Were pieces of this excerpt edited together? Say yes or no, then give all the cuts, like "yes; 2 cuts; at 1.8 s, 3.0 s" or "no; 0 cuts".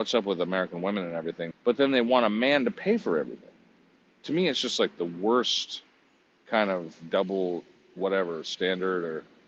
yes; 1 cut; at 1.5 s